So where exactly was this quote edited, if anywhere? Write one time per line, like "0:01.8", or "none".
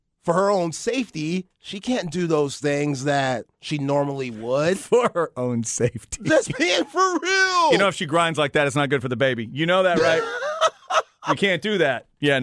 none